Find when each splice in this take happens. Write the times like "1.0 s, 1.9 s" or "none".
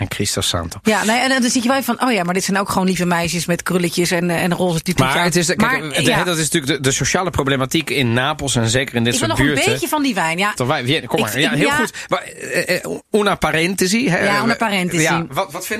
10.6 s